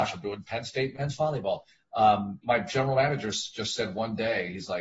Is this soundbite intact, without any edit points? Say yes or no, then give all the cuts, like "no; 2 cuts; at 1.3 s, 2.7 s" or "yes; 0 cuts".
no; 1 cut; at 2.4 s